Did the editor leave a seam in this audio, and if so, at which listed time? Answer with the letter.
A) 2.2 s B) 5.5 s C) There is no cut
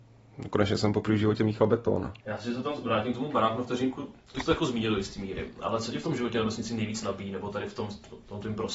A